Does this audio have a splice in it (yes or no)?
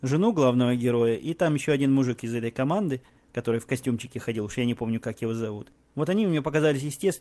no